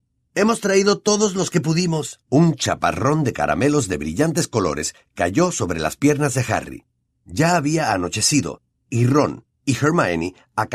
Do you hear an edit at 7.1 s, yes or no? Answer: no